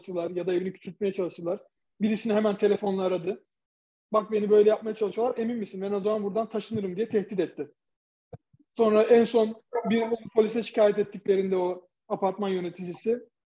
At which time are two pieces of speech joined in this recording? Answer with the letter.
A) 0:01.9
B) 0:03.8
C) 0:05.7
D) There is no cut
D